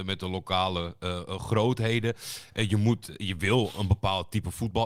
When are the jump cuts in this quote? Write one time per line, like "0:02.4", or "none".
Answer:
none